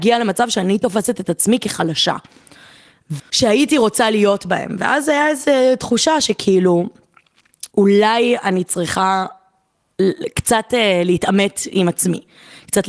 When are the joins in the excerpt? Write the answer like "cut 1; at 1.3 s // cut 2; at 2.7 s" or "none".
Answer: cut 1; at 3.2 s // cut 2; at 7.7 s